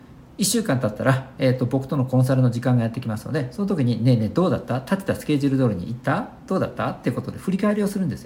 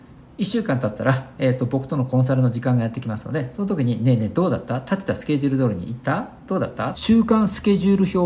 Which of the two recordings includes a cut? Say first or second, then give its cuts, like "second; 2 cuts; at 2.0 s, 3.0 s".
second; 1 cut; at 6.9 s